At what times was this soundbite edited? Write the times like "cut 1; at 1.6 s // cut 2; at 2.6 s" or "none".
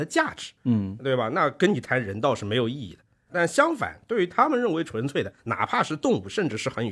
none